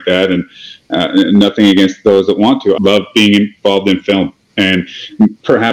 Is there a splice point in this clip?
yes; 1 cut; at 2.8 s

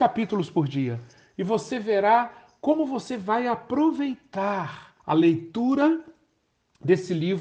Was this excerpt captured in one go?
no; 1 cut; at 5.0 s

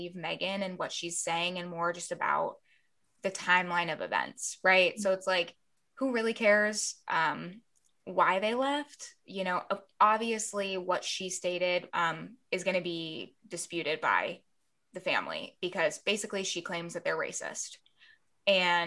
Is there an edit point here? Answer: yes; 1 cut; at 11.9 s

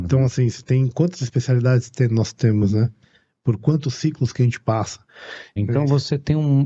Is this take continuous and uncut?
no; 1 cut; at 5.6 s

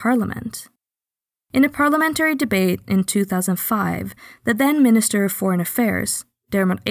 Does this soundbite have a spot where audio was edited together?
no; 0 cuts

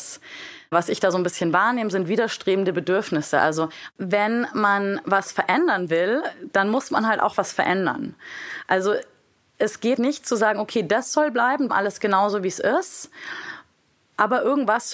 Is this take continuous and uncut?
no; 2 cuts; at 10.0 s, 11.7 s

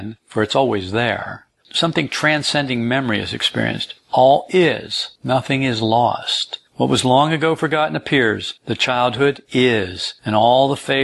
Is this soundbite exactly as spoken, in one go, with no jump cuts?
yes; 0 cuts

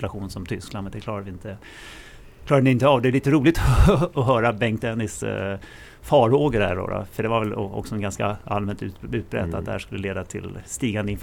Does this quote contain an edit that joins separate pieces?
no; 0 cuts

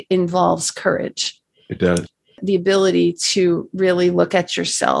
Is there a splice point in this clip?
no; 0 cuts

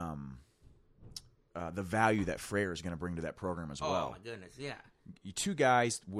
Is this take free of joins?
yes; 0 cuts

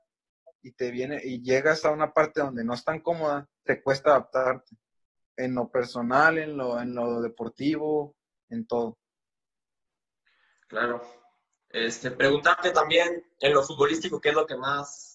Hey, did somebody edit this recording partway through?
yes; 1 cut; at 3.6 s

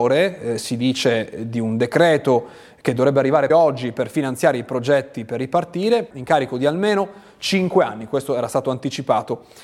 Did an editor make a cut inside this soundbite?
yes; 2 cuts; at 3.5 s, 6.1 s

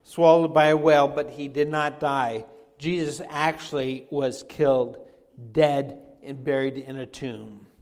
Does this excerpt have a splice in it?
no; 0 cuts

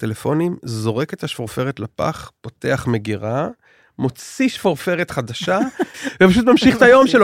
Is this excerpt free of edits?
no; 1 cut; at 5.9 s

